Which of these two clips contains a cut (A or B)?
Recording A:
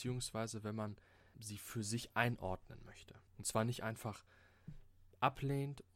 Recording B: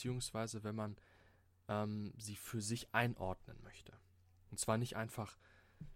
A